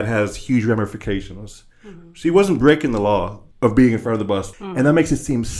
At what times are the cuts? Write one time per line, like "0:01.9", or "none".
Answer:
0:03.5
0:04.5